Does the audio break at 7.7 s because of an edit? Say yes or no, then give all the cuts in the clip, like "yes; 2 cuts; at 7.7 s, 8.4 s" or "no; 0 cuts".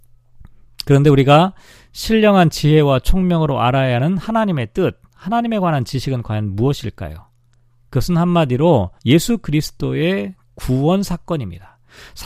no; 1 cut; at 9.0 s